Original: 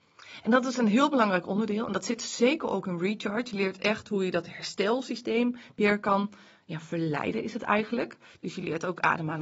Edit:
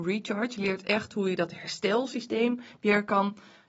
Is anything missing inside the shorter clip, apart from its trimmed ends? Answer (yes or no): no